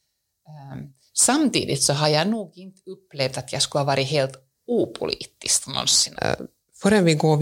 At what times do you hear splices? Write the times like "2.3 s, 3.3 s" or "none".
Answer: 6.1 s